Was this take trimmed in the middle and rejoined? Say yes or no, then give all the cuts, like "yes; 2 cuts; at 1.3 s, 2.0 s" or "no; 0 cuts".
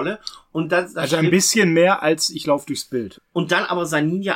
yes; 1 cut; at 3.1 s